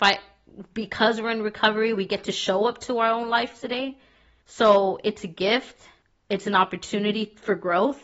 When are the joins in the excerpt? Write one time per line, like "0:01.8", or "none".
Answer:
none